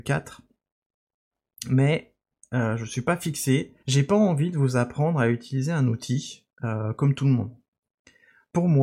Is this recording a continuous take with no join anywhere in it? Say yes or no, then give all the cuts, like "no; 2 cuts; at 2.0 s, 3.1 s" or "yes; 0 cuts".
no; 1 cut; at 3.8 s